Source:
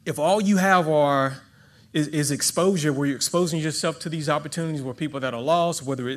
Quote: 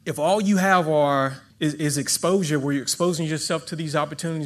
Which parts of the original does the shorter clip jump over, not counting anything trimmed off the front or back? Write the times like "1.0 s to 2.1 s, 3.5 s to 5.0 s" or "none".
1.5 s to 1.8 s